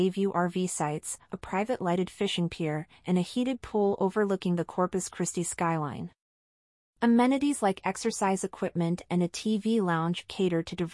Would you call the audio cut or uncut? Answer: uncut